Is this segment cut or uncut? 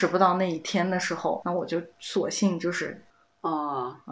uncut